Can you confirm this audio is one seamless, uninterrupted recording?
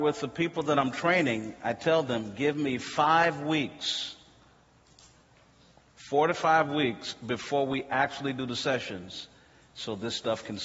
yes; 0 cuts

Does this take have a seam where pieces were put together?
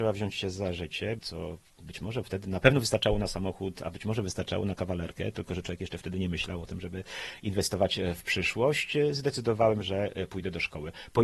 yes; 1 cut; at 1.2 s

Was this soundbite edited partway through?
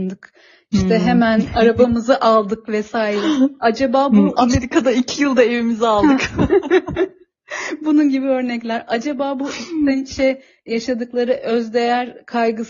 no; 0 cuts

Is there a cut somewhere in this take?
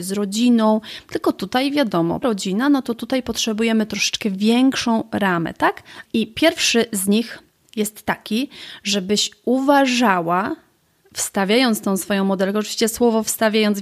yes; 2 cuts; at 2.2 s, 6.1 s

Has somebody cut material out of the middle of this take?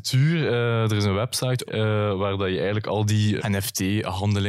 yes; 2 cuts; at 1.7 s, 3.4 s

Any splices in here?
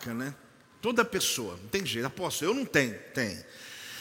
no; 0 cuts

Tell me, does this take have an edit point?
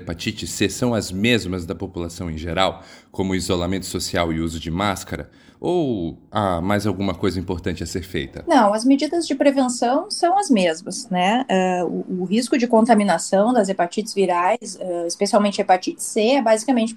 no; 0 cuts

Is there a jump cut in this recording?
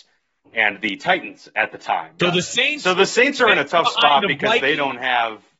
yes; 1 cut; at 2.2 s

